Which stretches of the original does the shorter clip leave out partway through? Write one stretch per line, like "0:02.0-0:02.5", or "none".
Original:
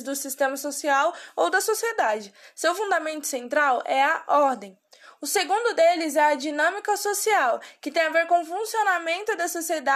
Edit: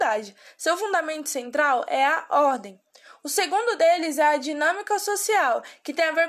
none